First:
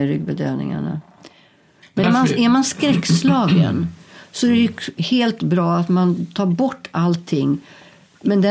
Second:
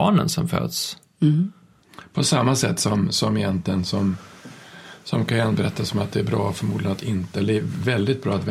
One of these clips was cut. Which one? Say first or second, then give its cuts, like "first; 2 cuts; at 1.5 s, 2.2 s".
first; 1 cut; at 2.0 s